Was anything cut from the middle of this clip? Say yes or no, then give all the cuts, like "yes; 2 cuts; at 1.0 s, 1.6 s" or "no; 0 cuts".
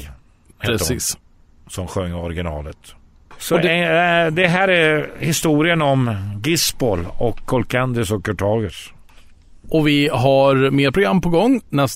no; 0 cuts